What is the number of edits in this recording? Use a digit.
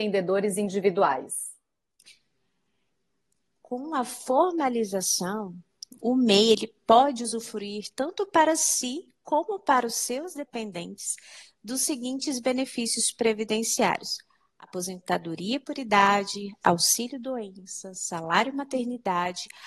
2